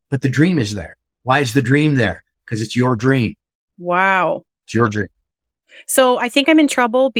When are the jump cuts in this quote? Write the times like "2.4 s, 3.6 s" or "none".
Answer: 4.5 s

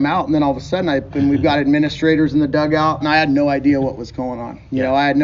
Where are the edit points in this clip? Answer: 1.1 s, 3.0 s

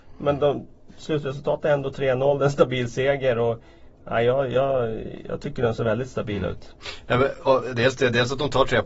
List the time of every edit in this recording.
none

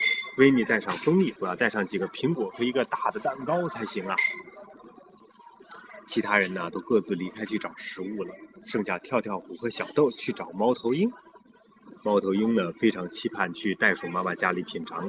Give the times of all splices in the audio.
1.4 s

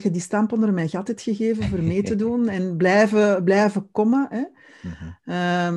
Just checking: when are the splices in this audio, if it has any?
none

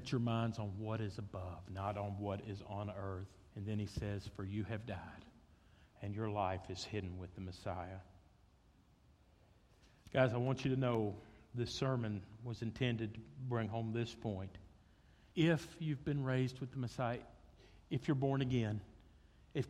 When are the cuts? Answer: 3.5 s, 15.3 s

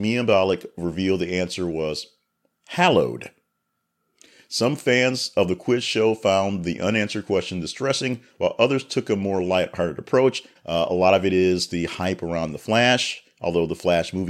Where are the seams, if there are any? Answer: 10.6 s

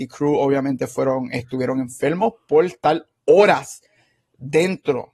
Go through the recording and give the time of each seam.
none

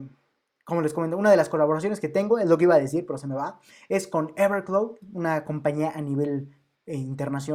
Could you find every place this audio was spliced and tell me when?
none

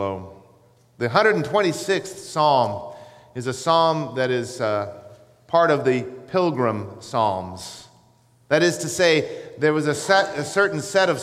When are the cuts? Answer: none

